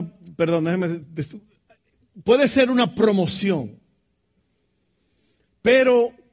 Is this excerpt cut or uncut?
uncut